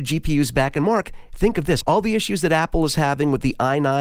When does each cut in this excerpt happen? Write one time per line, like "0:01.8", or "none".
0:01.8